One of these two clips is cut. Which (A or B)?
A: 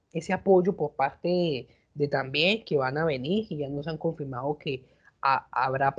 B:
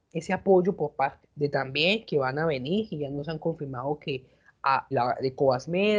B